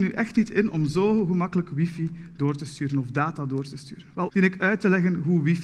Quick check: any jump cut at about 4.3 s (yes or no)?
yes